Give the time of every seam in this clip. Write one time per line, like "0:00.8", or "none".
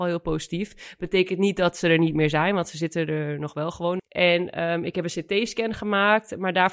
0:04.0